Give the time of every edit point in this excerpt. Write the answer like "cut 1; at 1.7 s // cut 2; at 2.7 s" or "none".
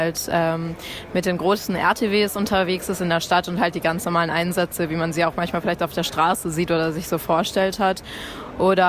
none

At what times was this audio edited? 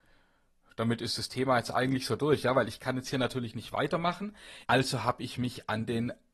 cut 1; at 4.6 s

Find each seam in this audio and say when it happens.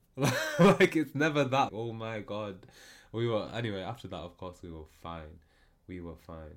cut 1; at 1.7 s

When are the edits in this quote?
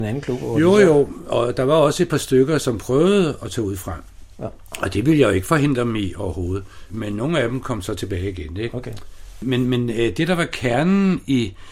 none

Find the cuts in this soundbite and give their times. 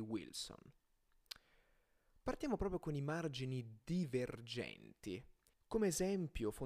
cut 1; at 5.5 s

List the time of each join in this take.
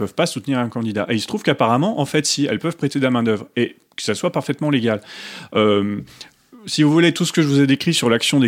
none

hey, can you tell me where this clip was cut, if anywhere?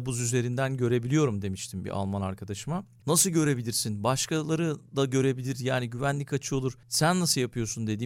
cut 1; at 3.0 s

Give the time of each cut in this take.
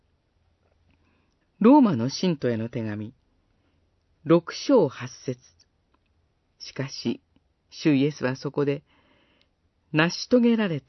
cut 1; at 1.4 s // cut 2; at 6.5 s

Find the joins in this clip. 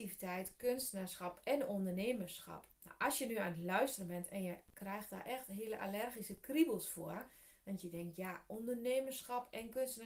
cut 1; at 2.7 s

